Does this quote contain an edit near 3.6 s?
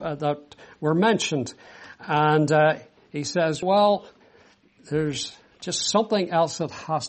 yes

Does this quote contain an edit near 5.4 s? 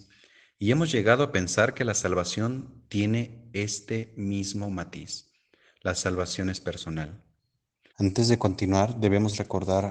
no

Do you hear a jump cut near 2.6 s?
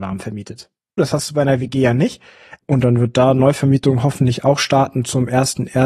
yes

